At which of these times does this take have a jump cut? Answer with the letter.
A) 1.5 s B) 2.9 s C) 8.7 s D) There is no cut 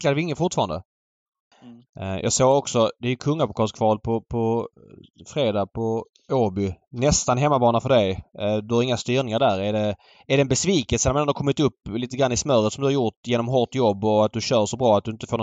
A